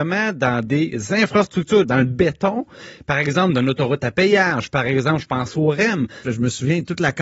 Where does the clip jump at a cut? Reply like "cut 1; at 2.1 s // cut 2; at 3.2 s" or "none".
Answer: cut 1; at 1.8 s // cut 2; at 6.2 s